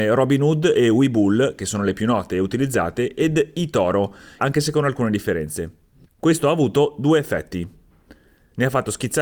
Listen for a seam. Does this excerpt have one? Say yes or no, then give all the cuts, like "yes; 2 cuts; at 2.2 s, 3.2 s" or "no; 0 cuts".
yes; 2 cuts; at 4.4 s, 6.0 s